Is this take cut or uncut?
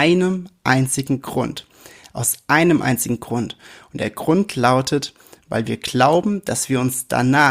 uncut